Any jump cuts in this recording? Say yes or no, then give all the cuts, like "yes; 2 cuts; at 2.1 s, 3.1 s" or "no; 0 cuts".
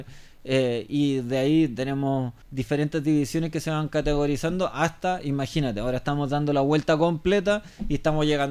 yes; 1 cut; at 2.4 s